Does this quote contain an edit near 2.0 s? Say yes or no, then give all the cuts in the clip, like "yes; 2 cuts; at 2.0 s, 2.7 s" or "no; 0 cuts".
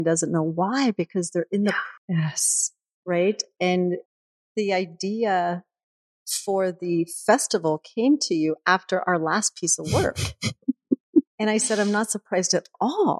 yes; 1 cut; at 2.0 s